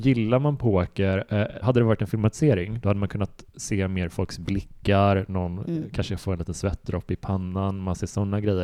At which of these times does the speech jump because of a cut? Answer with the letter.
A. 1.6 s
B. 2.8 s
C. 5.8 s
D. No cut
A